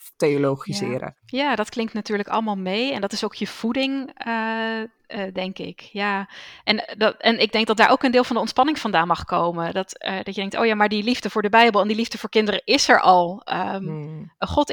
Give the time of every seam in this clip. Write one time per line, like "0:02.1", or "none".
0:01.2